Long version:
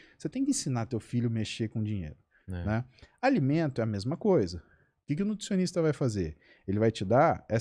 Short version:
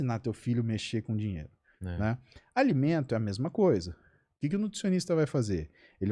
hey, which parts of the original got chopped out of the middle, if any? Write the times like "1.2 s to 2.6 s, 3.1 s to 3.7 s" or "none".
none